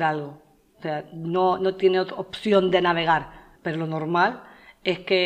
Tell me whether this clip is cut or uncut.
cut